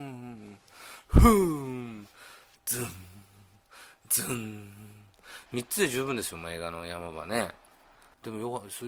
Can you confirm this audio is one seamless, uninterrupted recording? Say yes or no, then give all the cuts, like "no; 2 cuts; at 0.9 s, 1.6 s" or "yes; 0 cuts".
no; 1 cut; at 5.5 s